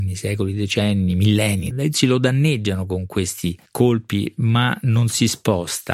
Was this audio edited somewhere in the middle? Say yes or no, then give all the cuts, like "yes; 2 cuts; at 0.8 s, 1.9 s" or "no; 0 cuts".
yes; 2 cuts; at 1.7 s, 3.7 s